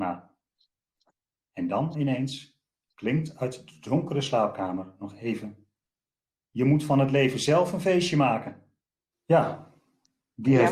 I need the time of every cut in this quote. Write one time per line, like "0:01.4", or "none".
0:09.1